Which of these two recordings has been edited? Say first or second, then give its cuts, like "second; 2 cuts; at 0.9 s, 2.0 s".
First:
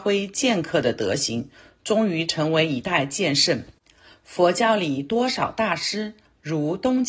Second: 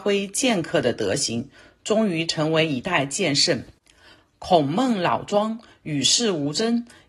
second; 1 cut; at 4.2 s